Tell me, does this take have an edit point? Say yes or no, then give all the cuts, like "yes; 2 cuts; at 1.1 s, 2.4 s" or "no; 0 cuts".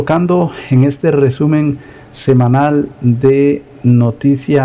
no; 0 cuts